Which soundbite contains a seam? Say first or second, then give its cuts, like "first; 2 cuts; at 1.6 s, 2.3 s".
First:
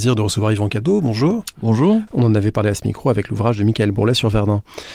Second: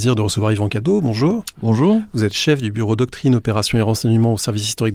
first; 1 cut; at 2.1 s